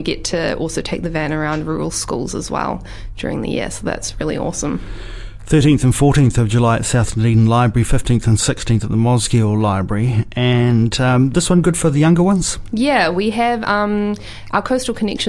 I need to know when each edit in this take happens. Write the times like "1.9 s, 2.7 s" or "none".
none